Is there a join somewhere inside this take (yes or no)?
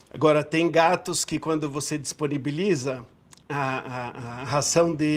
no